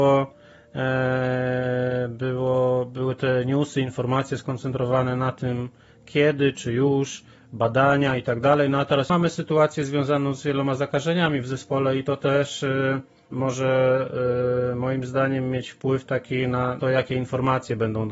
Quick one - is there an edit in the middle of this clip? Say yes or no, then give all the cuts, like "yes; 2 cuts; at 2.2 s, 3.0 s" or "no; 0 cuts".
yes; 2 cuts; at 13.3 s, 16.8 s